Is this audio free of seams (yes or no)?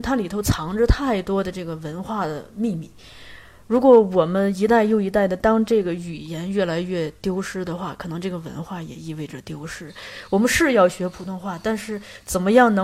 yes